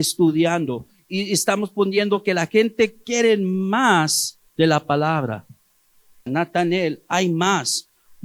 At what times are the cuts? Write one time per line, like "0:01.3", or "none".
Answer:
0:06.3